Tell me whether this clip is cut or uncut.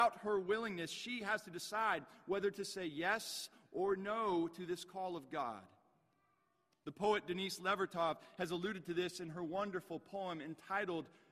uncut